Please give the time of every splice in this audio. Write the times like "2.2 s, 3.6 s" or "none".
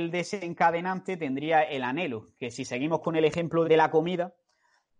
3.6 s